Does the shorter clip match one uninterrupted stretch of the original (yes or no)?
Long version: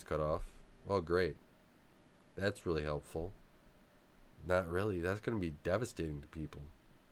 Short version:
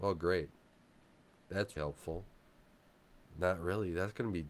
no